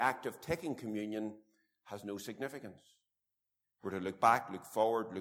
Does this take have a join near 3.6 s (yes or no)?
yes